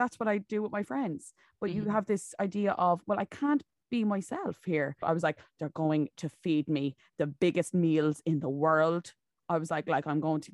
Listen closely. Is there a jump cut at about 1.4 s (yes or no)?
no